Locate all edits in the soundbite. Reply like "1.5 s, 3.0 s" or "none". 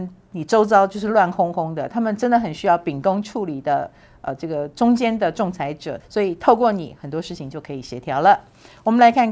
6.0 s